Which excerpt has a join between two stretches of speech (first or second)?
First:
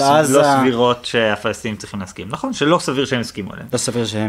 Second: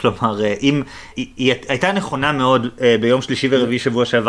second